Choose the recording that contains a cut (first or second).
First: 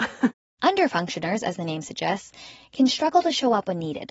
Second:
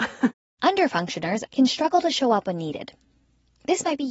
second